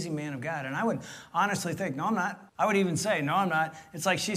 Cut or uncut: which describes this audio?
cut